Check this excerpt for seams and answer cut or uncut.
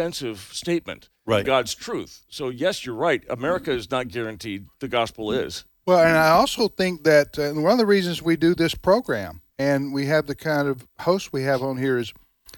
cut